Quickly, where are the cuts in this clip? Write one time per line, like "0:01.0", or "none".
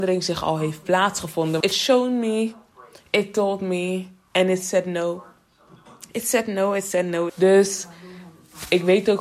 0:01.6
0:07.3